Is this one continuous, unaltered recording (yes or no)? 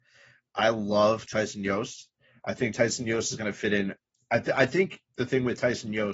no